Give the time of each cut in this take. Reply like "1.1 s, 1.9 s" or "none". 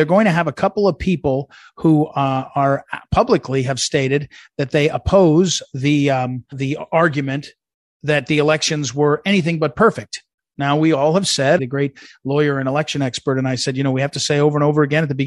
6.5 s, 11.6 s